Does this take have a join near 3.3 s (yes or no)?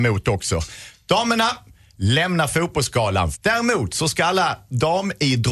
yes